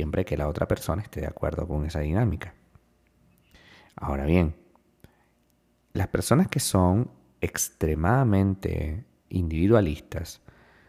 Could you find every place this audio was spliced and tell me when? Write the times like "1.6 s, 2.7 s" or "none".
9.3 s